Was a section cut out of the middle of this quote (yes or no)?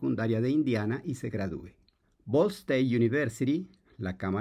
yes